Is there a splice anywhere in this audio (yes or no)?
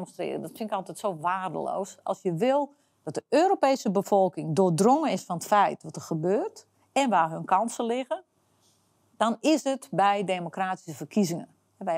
no